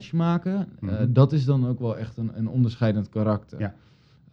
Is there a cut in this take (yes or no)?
no